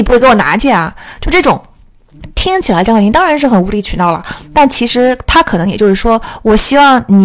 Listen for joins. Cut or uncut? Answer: uncut